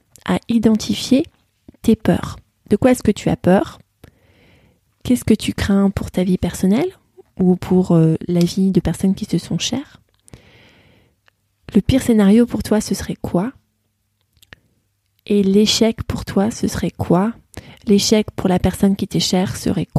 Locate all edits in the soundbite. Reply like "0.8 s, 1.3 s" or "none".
none